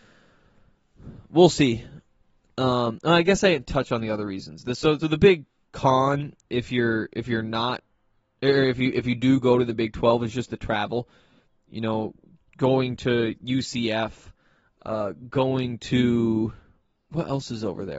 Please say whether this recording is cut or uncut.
cut